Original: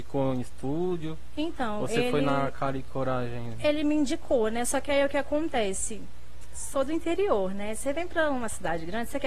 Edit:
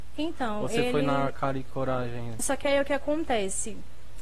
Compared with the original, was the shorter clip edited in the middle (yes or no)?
yes